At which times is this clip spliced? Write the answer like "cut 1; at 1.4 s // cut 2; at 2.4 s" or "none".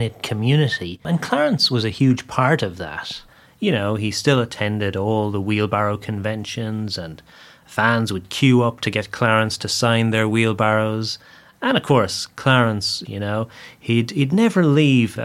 cut 1; at 13.1 s